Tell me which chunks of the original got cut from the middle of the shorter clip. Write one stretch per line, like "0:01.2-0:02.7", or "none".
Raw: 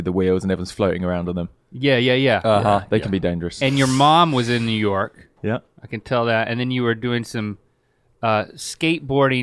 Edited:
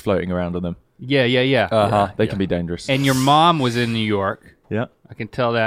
none